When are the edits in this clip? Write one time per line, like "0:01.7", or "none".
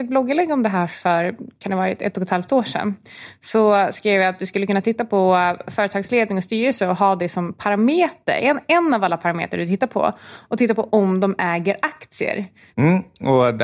0:12.7